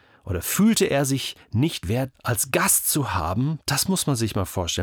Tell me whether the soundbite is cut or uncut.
cut